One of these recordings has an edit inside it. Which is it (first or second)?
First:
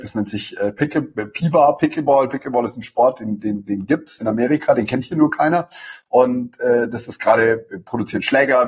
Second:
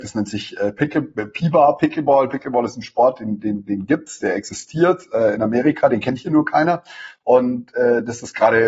first